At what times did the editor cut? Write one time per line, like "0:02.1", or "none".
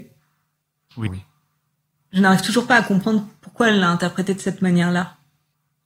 0:01.1